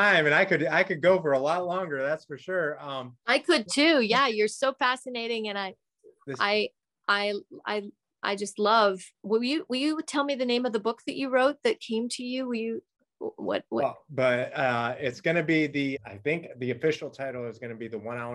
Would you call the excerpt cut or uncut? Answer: cut